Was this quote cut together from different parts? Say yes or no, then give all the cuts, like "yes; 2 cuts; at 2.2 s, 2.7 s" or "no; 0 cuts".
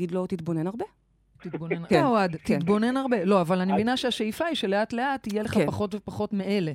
yes; 1 cut; at 1.9 s